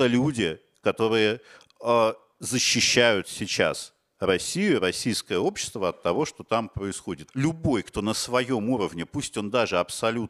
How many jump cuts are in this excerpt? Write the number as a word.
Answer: one